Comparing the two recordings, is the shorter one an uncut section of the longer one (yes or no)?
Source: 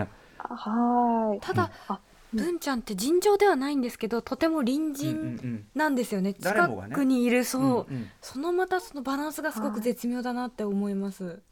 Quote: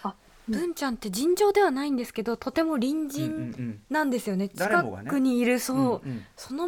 yes